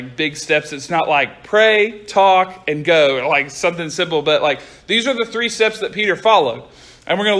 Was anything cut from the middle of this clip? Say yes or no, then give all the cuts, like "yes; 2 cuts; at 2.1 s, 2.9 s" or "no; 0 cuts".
no; 0 cuts